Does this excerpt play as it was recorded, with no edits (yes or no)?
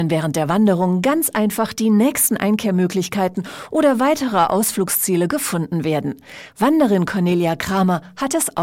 yes